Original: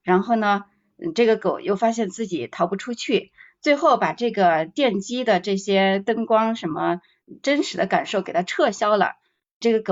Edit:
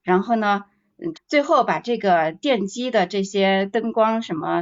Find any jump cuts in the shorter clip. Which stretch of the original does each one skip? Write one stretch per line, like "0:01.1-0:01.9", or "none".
0:01.1-0:03.5